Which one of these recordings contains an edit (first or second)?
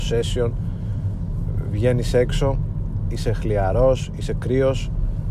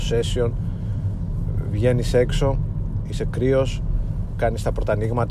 second